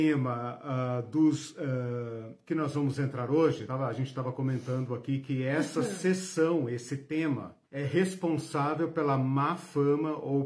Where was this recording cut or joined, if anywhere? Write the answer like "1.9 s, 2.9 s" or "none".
3.7 s, 7.6 s